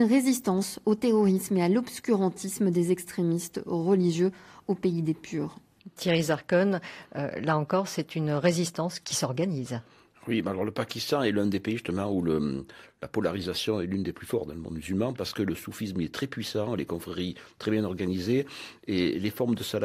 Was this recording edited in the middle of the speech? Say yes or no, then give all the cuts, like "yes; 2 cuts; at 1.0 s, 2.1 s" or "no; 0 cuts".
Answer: no; 0 cuts